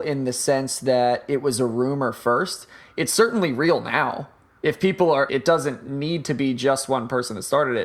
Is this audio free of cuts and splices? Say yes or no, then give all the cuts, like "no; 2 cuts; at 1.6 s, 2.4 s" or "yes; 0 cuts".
no; 1 cut; at 5.3 s